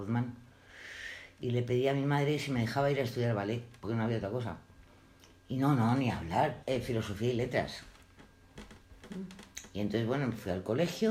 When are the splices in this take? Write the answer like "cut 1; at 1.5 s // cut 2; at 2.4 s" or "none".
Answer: cut 1; at 6.6 s